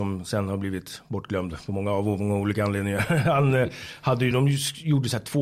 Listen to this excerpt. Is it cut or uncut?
uncut